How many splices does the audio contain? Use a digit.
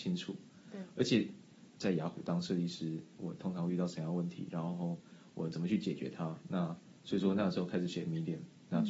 2